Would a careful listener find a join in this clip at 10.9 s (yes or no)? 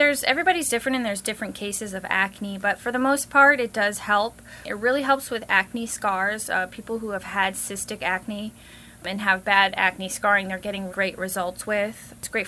yes